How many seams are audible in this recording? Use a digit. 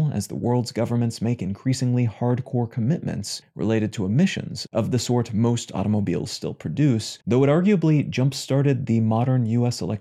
1